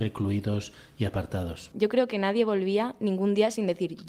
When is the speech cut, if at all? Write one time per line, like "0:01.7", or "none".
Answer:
0:01.7

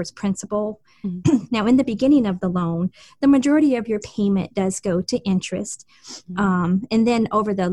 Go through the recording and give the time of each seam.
0:01.2

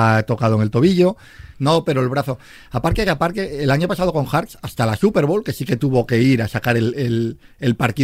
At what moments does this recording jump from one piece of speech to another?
0:01.5

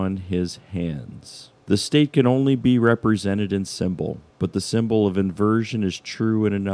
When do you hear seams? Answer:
0:01.6
0:04.3

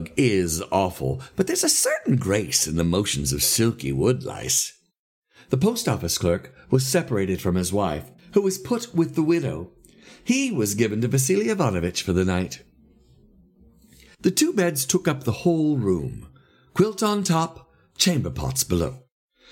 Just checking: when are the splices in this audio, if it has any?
none

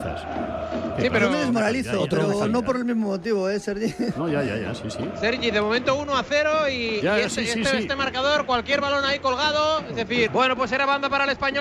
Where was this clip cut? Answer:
0:10.3

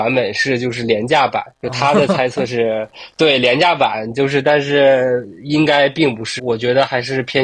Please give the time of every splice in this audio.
0:01.5
0:06.4

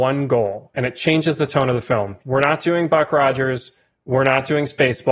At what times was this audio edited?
0:02.2

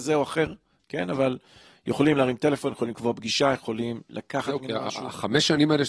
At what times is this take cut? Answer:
none

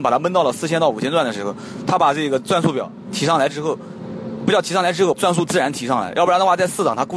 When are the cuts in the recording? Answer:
0:05.1

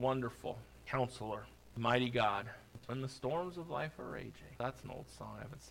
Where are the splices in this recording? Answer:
0:02.8

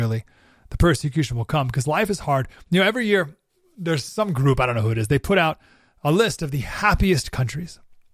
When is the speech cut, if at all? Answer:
none

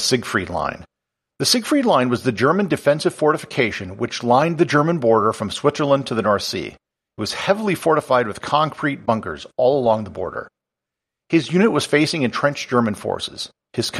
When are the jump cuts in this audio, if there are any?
none

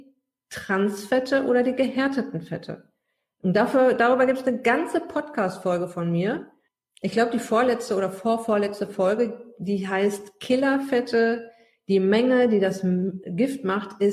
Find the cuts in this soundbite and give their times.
none

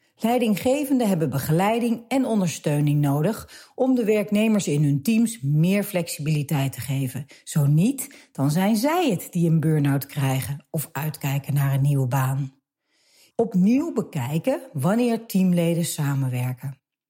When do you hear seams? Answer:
0:13.3

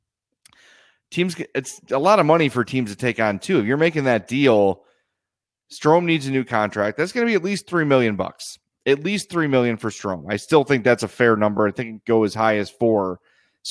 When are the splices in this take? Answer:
none

